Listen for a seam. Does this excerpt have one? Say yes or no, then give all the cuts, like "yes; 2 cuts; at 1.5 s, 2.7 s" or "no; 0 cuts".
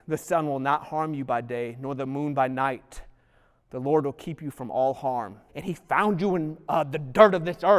yes; 1 cut; at 5.5 s